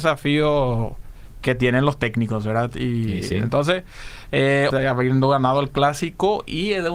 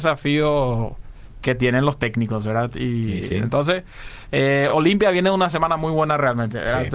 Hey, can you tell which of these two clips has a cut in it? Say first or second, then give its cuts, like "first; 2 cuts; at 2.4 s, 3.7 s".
first; 1 cut; at 4.7 s